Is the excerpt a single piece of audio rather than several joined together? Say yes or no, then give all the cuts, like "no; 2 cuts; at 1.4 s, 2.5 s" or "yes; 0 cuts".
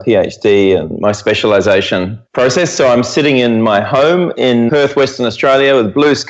no; 2 cuts; at 2.3 s, 4.7 s